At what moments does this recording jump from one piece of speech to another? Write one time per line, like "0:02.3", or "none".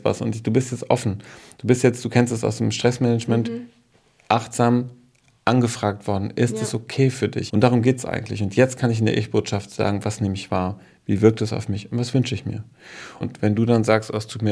0:07.5
0:13.2